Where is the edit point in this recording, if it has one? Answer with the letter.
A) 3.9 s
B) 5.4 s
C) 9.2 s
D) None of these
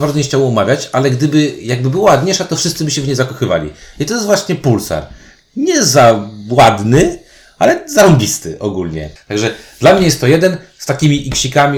C